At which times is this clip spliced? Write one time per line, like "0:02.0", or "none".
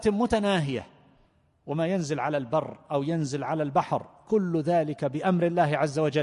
none